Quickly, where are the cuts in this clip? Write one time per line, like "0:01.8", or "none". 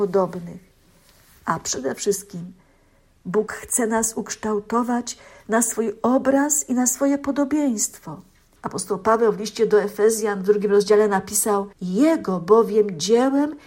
0:08.6
0:11.7